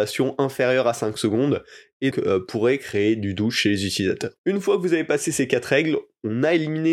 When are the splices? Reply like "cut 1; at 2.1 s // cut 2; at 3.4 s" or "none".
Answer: cut 1; at 2.1 s // cut 2; at 4.4 s